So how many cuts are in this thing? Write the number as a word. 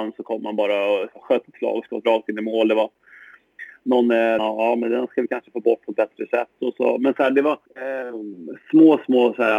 two